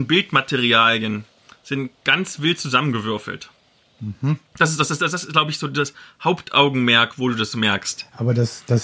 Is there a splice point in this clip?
no; 0 cuts

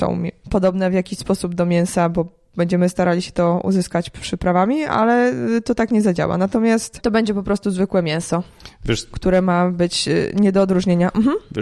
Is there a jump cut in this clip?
no; 0 cuts

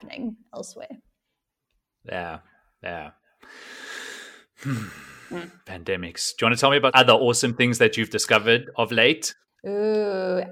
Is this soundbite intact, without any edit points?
yes; 0 cuts

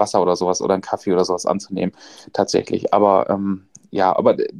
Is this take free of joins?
yes; 0 cuts

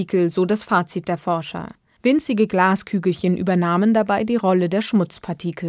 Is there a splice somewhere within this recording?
yes; 1 cut; at 2.0 s

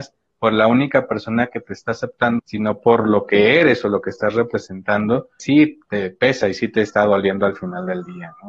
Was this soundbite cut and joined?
yes; 2 cuts; at 2.4 s, 5.4 s

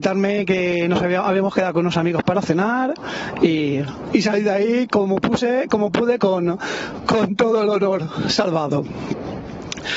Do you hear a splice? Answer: no; 0 cuts

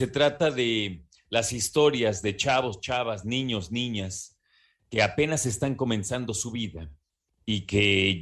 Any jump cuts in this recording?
no; 0 cuts

